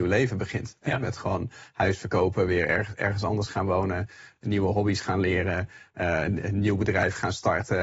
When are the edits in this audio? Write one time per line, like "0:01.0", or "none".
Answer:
none

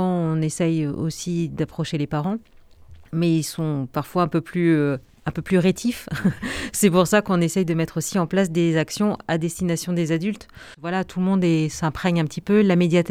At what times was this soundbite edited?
0:03.0

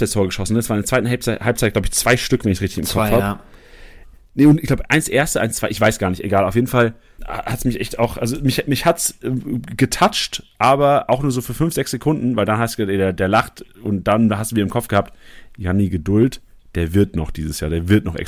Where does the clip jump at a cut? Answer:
0:07.2

